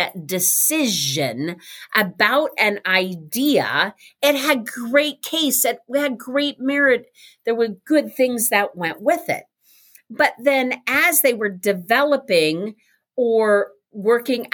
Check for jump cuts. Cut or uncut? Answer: uncut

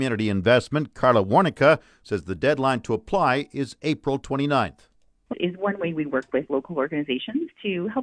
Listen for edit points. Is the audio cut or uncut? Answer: cut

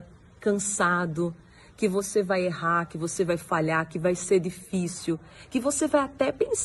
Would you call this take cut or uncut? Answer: uncut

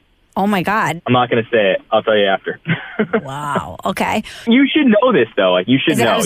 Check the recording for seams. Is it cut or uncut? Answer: cut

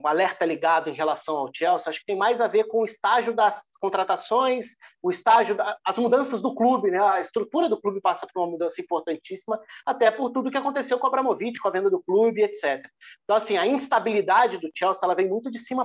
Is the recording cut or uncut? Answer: uncut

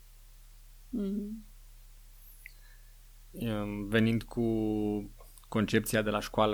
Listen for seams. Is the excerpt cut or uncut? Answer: cut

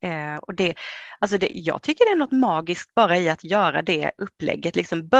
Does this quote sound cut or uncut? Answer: uncut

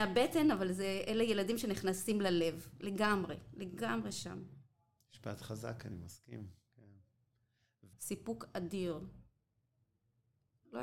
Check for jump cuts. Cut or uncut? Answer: cut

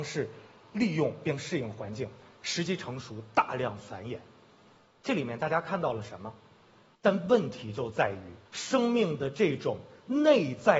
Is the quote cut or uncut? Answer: cut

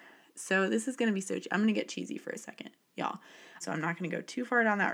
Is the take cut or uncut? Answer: cut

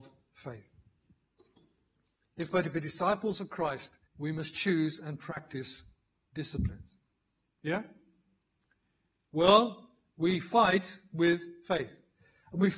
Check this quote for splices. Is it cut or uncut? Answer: cut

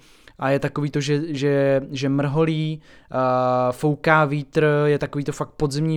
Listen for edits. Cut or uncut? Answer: uncut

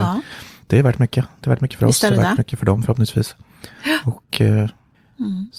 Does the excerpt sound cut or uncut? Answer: uncut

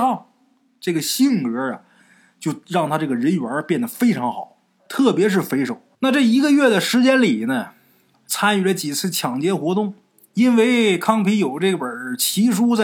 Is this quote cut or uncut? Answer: cut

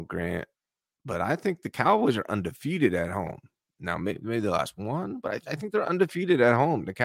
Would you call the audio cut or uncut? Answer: uncut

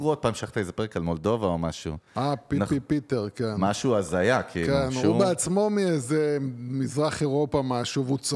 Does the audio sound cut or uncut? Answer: uncut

